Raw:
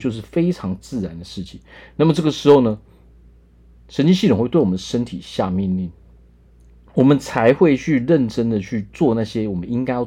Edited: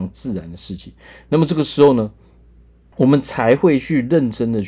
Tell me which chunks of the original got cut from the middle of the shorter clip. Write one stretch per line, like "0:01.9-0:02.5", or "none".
0:03.6-0:06.9